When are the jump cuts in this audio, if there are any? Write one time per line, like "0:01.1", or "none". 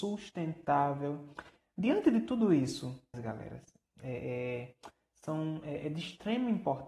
0:01.6
0:03.1